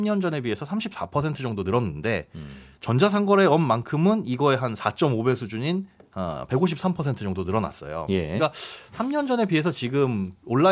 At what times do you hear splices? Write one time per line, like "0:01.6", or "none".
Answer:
none